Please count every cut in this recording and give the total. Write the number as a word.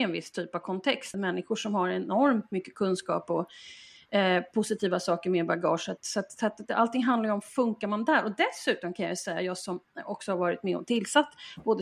one